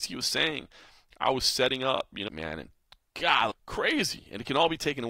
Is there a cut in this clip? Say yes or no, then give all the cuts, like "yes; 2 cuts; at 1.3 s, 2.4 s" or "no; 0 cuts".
yes; 2 cuts; at 2.3 s, 3.5 s